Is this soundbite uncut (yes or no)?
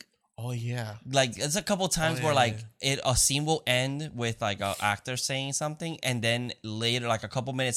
yes